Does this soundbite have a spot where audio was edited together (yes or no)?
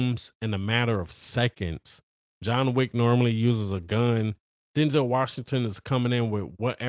no